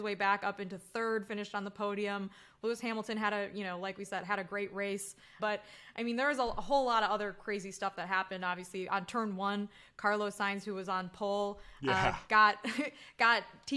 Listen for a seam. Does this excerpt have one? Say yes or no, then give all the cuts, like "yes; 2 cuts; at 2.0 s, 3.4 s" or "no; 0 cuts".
yes; 1 cut; at 5.4 s